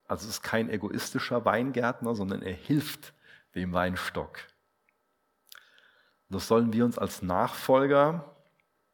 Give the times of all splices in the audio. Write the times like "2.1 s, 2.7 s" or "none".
none